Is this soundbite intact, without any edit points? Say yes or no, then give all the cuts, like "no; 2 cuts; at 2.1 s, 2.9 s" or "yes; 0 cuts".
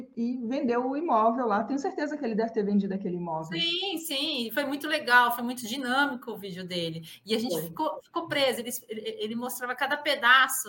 yes; 0 cuts